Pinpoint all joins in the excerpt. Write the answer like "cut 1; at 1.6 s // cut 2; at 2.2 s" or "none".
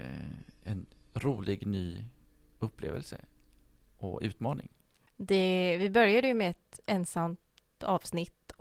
cut 1; at 5.1 s